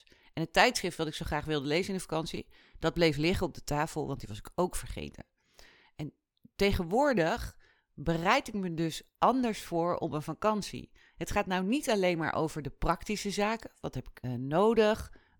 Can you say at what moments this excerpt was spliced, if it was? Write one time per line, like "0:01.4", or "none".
0:14.2